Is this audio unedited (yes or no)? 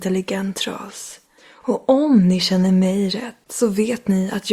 no